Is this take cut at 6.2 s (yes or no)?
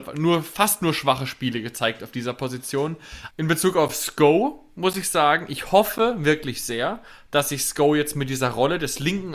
no